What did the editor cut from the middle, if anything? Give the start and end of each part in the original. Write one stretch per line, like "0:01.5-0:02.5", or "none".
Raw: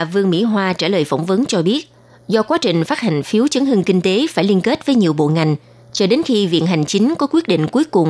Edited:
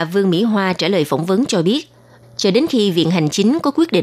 0:02.2-0:05.8